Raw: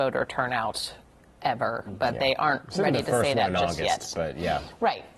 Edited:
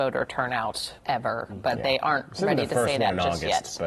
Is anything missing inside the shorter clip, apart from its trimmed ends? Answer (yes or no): yes